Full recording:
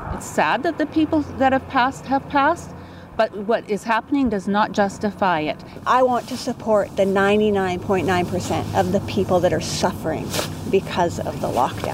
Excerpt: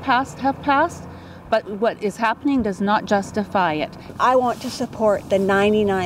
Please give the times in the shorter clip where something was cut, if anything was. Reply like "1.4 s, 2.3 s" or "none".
none